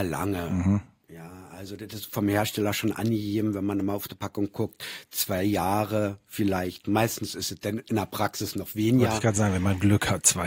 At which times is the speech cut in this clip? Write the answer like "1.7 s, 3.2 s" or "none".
none